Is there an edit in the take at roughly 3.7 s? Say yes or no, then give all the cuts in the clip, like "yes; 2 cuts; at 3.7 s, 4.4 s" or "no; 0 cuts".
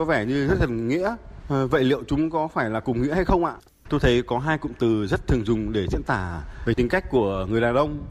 yes; 1 cut; at 3.7 s